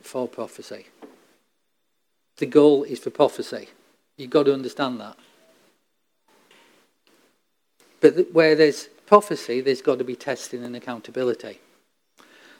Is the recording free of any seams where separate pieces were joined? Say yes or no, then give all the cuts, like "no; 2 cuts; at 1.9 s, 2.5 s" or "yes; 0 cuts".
yes; 0 cuts